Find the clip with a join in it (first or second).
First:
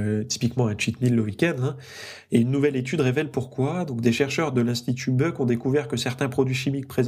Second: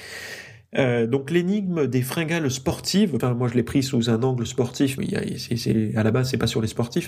second